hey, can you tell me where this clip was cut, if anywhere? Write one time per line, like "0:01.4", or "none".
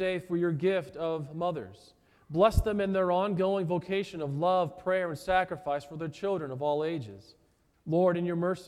0:07.7